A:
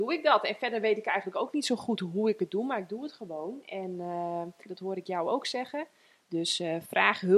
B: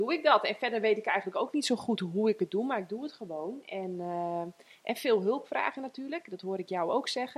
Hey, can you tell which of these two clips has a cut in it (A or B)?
A